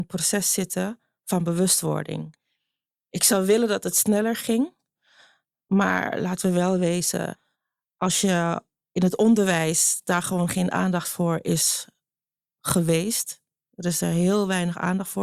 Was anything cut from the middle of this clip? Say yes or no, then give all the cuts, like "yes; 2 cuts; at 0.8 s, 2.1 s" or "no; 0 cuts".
no; 0 cuts